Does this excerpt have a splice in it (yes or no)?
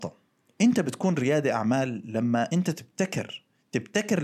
no